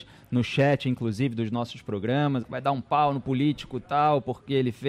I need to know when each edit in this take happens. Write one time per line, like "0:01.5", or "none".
0:02.4

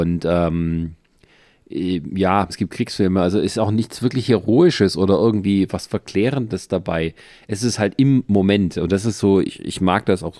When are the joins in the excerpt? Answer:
0:02.5

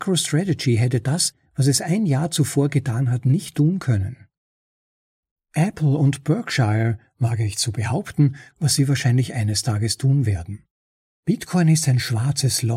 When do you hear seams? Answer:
0:08.5
0:11.1

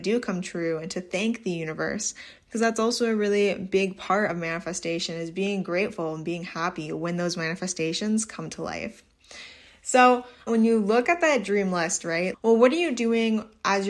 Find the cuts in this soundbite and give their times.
0:10.5
0:12.3

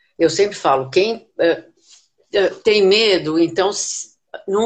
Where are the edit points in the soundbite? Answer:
none

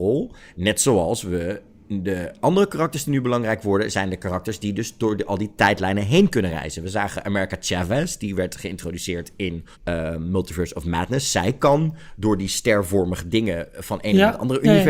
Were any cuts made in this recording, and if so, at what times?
0:09.7

